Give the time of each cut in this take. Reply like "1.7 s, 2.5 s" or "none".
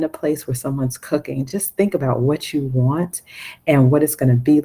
none